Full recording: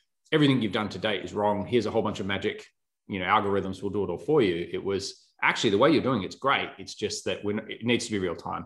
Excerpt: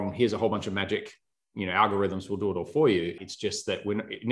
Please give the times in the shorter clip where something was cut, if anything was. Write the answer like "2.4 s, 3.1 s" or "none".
3.2 s